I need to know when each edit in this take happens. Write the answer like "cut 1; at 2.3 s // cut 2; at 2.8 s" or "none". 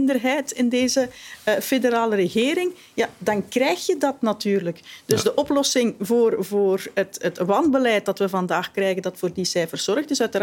none